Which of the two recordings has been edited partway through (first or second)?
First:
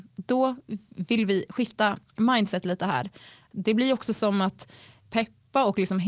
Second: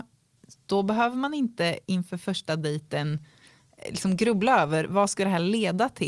first